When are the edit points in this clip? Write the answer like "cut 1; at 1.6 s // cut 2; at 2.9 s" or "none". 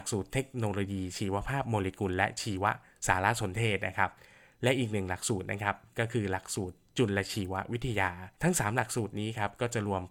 cut 1; at 8.3 s